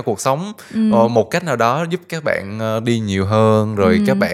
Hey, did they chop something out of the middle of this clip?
no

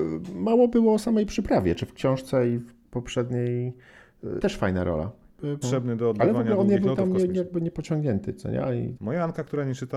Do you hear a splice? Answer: yes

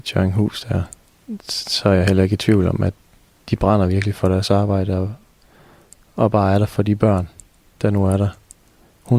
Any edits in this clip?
no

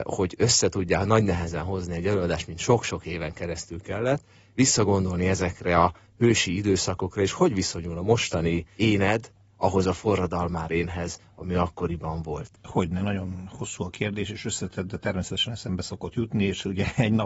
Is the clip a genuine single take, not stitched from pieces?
no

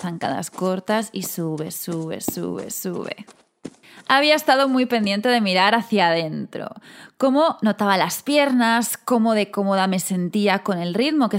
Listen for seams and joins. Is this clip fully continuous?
yes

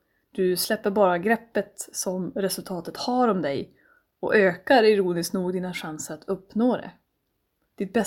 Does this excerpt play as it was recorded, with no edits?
yes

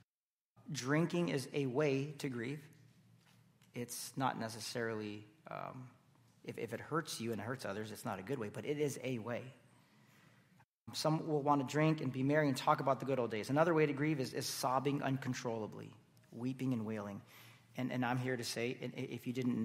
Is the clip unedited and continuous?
yes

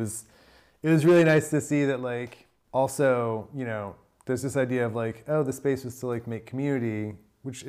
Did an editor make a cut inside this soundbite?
no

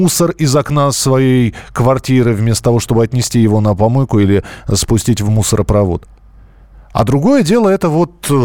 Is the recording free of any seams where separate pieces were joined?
yes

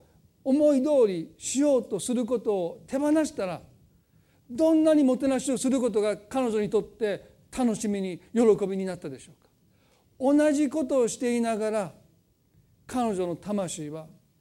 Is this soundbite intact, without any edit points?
yes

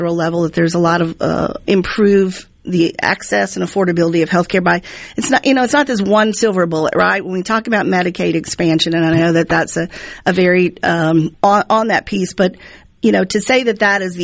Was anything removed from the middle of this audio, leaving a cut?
yes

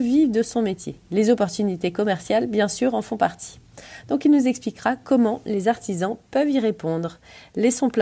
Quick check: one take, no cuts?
no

